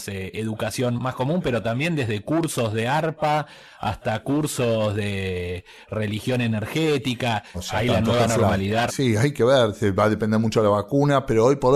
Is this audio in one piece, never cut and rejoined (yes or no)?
no